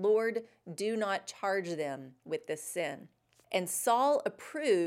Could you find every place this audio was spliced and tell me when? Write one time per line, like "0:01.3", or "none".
0:03.4